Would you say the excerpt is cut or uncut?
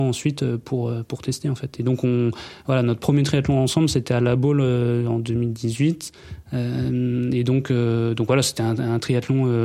uncut